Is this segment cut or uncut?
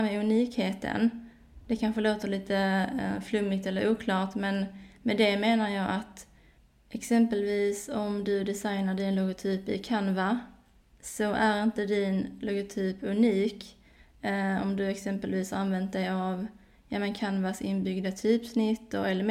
uncut